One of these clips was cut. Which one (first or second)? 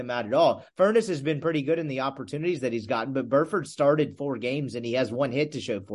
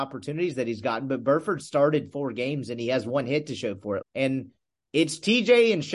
second